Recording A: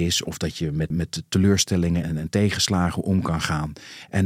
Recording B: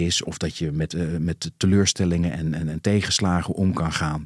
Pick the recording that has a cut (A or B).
A